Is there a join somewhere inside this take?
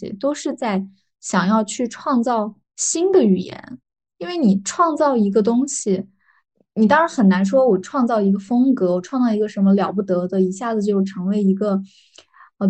no; 0 cuts

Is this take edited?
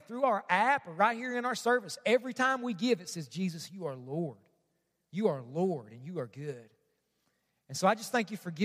no; 0 cuts

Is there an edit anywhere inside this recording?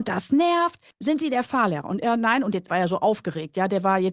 yes; 2 cuts; at 0.9 s, 2.7 s

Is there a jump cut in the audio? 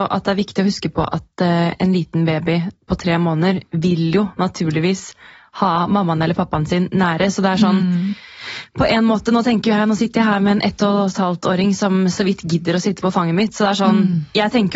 no; 0 cuts

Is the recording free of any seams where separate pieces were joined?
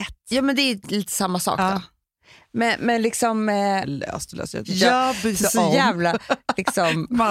no; 1 cut; at 4.6 s

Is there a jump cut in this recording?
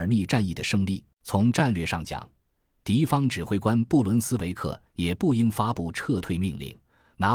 yes; 1 cut; at 1.1 s

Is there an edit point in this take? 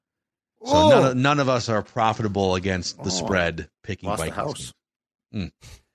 no; 0 cuts

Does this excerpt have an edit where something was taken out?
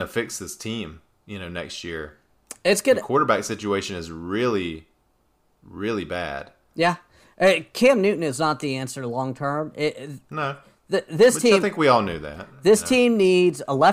no; 0 cuts

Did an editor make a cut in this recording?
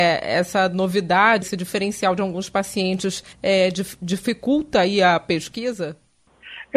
yes; 2 cuts; at 1.4 s, 3.3 s

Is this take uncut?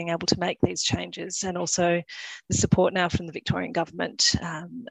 yes; 0 cuts

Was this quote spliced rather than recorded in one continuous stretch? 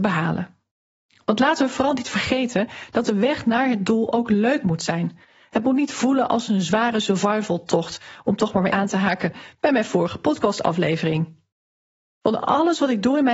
yes; 1 cut; at 8.7 s

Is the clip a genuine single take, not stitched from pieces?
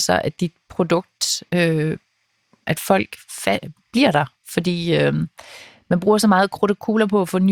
yes; 0 cuts

